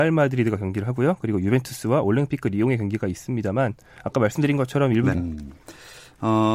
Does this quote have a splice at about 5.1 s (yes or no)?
yes